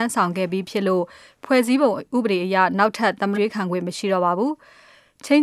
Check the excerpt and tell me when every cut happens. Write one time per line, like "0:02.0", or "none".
0:03.3